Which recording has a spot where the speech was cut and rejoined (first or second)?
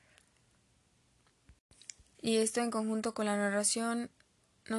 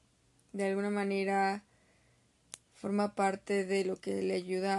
first